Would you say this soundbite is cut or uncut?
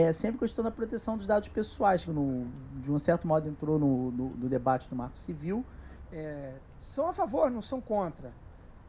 cut